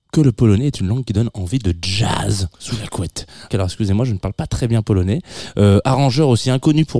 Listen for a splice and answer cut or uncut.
cut